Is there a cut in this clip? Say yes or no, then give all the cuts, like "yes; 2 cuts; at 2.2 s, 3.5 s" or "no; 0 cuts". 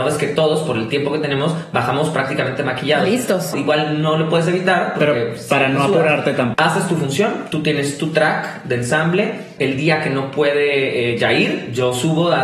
yes; 3 cuts; at 3.5 s, 6.5 s, 9.6 s